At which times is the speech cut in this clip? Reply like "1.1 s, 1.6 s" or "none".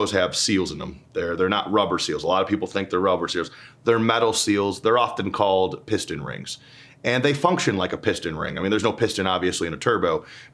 none